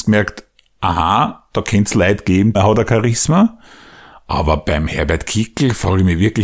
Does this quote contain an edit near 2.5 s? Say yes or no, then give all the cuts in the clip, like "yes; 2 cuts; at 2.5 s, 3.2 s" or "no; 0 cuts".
yes; 1 cut; at 2.5 s